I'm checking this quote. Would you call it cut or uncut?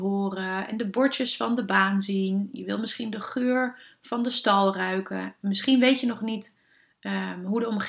uncut